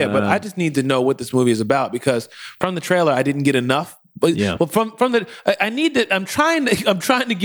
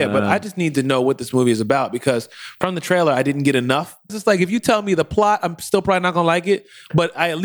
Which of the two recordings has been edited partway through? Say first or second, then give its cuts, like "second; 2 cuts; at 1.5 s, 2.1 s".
second; 1 cut; at 4.1 s